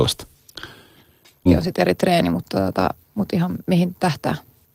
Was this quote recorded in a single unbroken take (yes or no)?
no